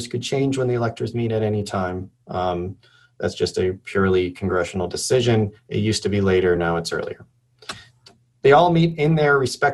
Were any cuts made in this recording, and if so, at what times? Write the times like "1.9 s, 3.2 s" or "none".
none